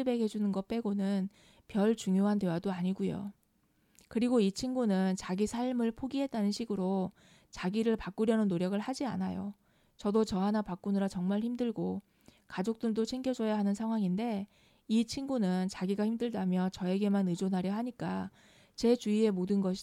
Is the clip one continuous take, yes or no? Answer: yes